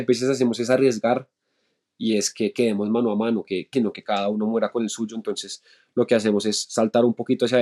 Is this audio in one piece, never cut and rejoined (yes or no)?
no